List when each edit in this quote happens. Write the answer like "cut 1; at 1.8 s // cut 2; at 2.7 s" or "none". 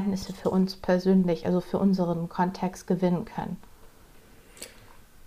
none

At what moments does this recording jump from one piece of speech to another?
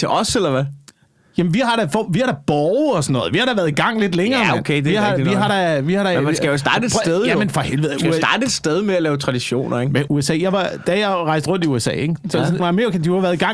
cut 1; at 10.1 s // cut 2; at 12.6 s

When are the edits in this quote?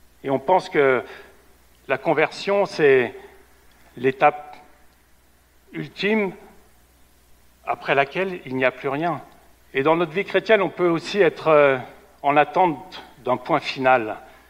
cut 1; at 9.5 s

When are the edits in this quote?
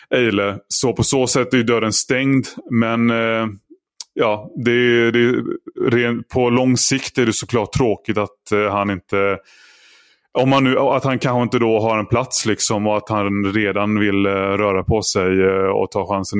none

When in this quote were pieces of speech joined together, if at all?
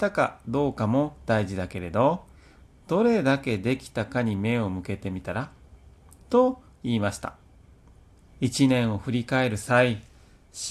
cut 1; at 8.3 s

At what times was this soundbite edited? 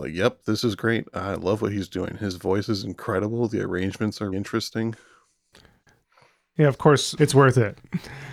cut 1; at 4.3 s // cut 2; at 7.2 s

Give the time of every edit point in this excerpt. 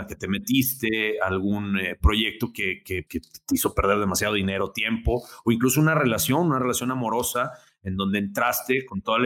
cut 1; at 3.1 s

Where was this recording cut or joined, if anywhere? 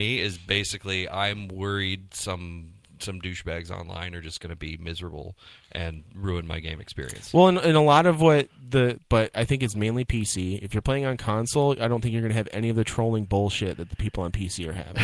cut 1; at 9.0 s

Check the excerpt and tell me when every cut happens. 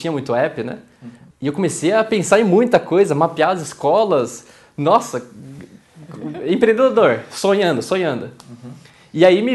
cut 1; at 1.3 s

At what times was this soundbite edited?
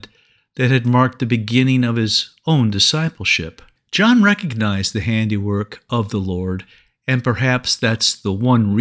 cut 1; at 3.8 s

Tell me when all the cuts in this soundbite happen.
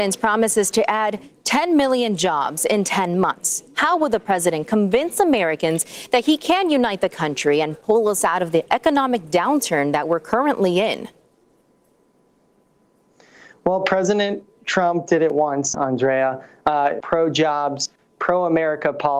cut 1; at 15.7 s // cut 2; at 17.0 s

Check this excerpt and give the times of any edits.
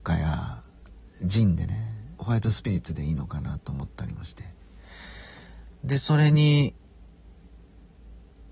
cut 1; at 2.2 s

